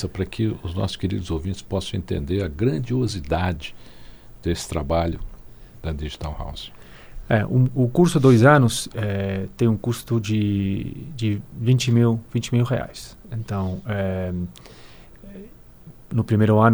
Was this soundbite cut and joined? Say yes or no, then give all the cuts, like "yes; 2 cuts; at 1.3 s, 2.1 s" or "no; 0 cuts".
no; 0 cuts